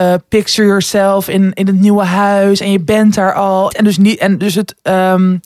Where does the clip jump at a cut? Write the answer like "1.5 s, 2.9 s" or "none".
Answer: 3.7 s